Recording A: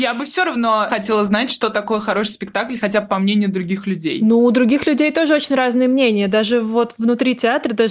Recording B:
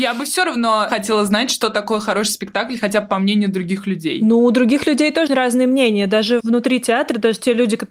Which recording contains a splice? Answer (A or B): B